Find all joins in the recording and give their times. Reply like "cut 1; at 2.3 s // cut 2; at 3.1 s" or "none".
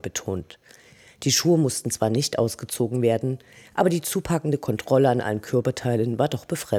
none